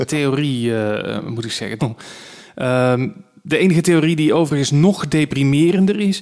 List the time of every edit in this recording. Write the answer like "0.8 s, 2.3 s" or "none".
1.8 s